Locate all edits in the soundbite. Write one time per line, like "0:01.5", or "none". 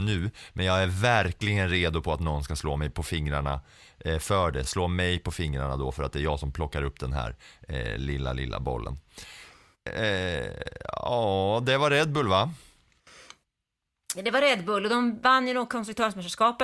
none